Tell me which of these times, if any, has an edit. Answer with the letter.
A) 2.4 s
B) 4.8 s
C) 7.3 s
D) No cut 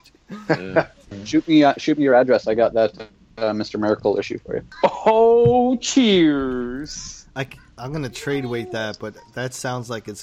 D